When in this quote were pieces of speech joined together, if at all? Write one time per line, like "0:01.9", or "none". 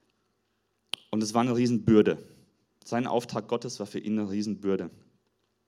none